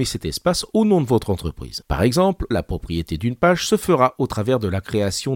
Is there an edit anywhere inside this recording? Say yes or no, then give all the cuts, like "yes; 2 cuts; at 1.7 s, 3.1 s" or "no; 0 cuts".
yes; 1 cut; at 2.5 s